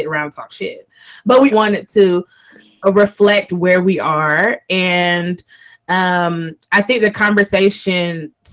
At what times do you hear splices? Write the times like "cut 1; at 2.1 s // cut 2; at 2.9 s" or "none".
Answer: cut 1; at 1.5 s